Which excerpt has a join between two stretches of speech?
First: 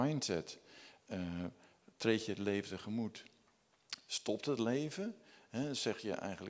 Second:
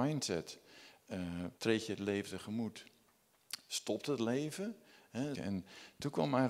second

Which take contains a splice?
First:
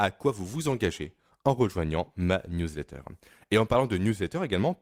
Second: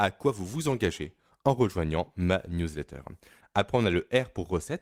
second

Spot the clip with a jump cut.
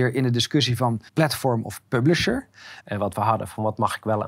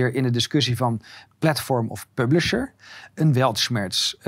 first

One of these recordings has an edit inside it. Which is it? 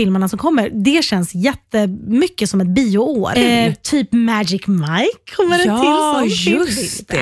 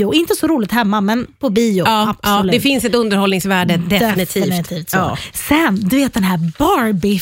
first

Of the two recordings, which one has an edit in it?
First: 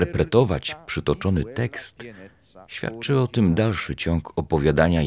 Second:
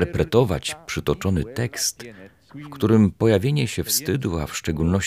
second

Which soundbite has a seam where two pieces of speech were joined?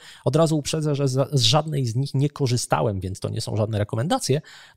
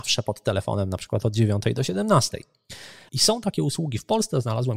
second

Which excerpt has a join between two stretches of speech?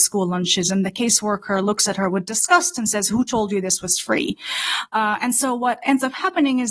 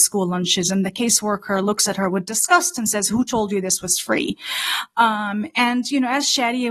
first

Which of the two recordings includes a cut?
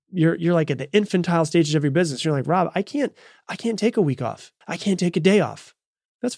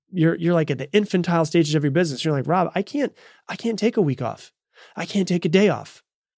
first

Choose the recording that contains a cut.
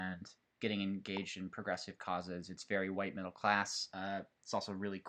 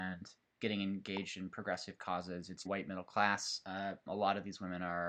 second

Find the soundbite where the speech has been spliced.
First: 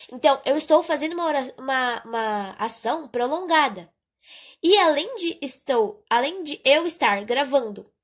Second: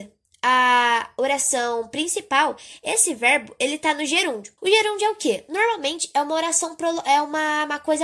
second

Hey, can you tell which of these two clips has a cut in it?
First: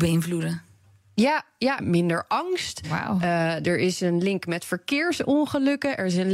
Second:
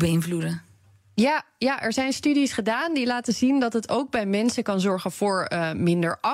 first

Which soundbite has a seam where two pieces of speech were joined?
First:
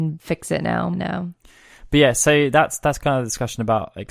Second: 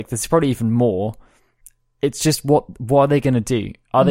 first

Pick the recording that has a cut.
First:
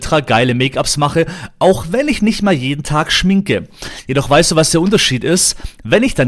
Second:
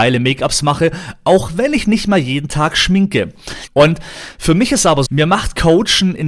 second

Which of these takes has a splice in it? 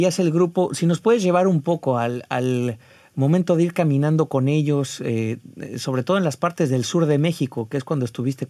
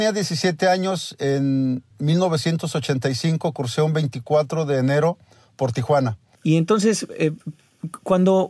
second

